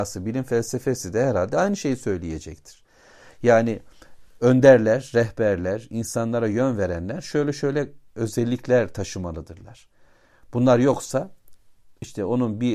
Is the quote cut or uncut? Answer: uncut